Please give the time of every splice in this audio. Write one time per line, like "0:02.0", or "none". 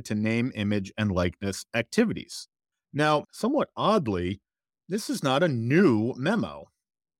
none